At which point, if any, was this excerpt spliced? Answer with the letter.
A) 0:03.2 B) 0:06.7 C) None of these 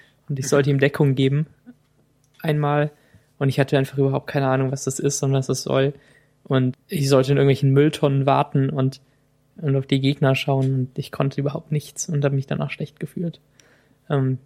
B